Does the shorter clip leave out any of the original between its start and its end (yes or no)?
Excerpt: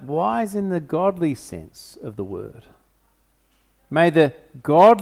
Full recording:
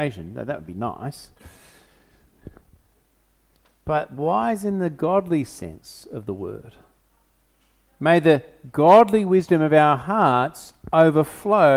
no